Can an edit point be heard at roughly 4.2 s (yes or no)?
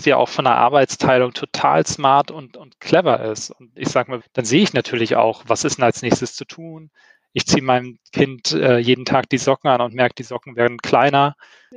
yes